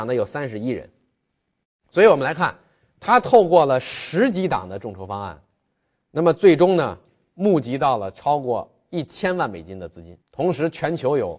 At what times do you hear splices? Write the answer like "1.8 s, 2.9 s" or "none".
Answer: 10.2 s